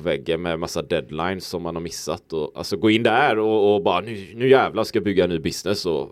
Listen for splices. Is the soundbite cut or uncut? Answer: uncut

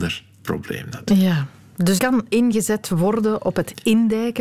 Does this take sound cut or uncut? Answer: cut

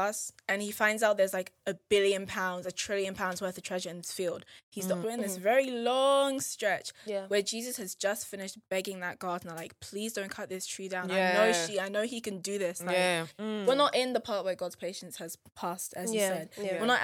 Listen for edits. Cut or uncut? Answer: cut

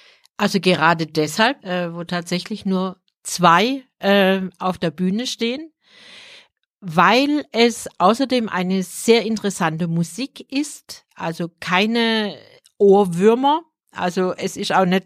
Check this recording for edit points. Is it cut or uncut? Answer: cut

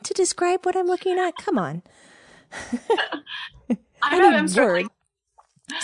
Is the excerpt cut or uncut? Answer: cut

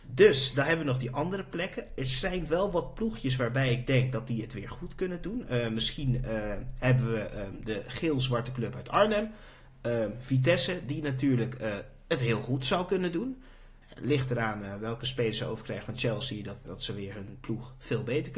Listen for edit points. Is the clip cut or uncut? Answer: cut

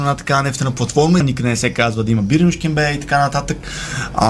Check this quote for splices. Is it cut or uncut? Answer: cut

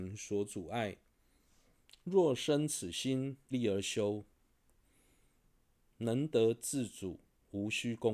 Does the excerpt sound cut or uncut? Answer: cut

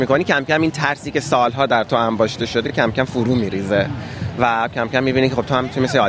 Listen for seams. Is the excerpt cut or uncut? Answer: uncut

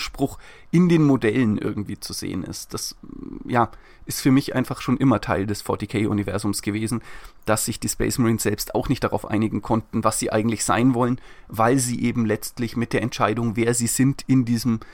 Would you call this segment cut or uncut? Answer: uncut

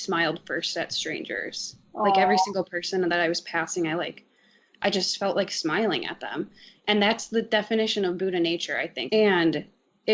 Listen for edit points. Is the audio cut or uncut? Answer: cut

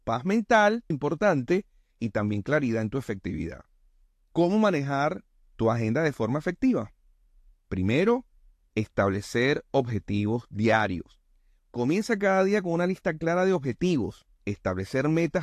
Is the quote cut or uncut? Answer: cut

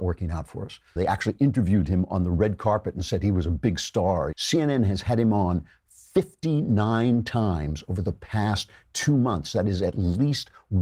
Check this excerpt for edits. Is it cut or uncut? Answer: cut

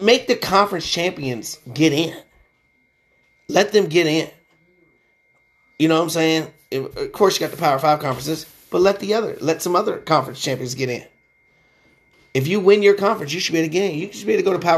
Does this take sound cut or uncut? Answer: uncut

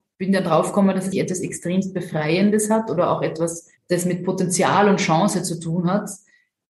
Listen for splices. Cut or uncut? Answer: cut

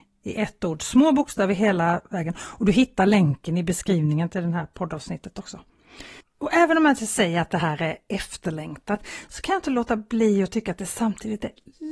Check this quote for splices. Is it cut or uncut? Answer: cut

